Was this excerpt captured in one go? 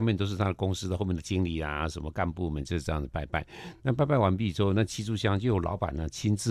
yes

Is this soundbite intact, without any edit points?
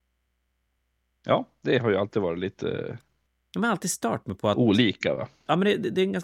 yes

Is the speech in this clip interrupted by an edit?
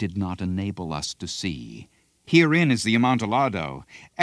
yes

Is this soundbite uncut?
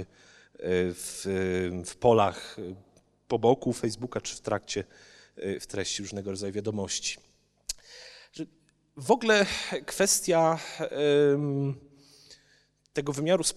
yes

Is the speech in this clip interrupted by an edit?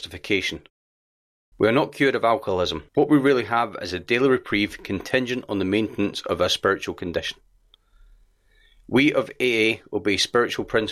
yes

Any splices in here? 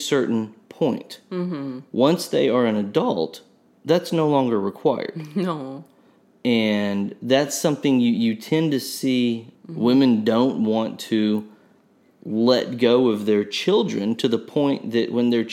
yes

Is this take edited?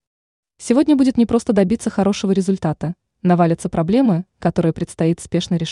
no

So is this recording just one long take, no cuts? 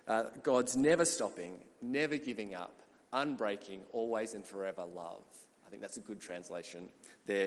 yes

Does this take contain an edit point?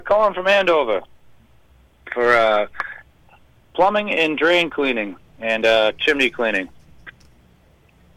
no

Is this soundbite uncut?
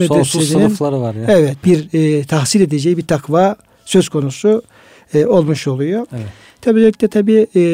no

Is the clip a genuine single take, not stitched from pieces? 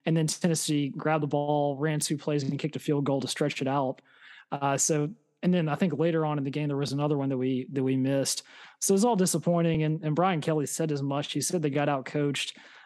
yes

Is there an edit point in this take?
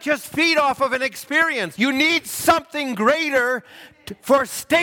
yes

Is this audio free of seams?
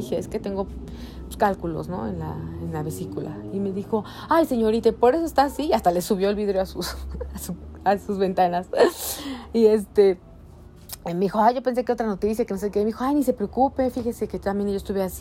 yes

